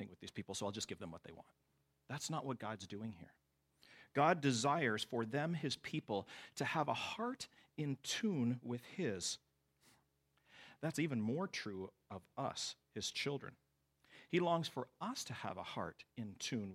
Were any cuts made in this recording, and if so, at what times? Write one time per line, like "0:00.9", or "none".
none